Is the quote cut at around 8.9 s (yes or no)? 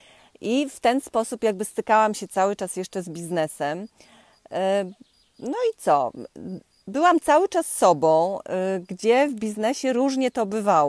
no